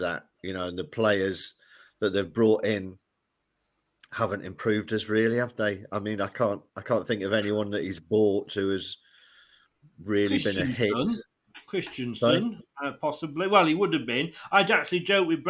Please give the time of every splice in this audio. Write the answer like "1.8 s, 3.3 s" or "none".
none